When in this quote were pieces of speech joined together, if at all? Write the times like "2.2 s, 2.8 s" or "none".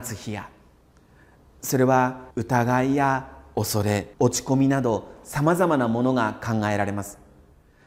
2.3 s, 4.1 s